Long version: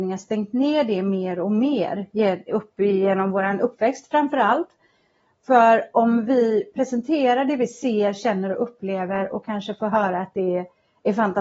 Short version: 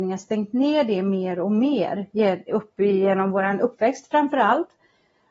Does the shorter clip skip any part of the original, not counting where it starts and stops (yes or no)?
no